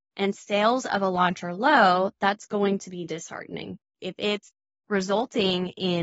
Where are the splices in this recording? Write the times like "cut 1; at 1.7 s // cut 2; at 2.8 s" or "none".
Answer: cut 1; at 3.9 s